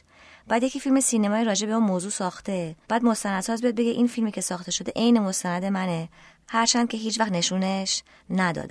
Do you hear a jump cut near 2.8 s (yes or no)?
yes